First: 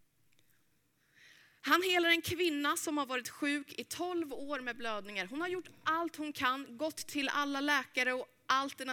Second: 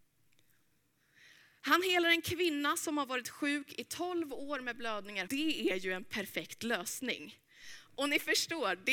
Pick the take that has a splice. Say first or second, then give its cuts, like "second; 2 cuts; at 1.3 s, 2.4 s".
second; 1 cut; at 5.3 s